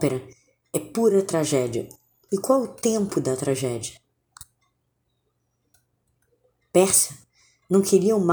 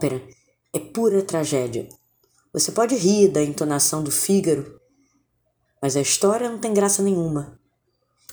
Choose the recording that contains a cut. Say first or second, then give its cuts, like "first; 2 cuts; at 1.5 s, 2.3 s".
first; 1 cut; at 2.3 s